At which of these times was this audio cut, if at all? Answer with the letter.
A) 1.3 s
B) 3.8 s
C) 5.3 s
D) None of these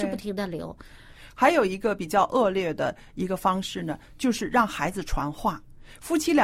D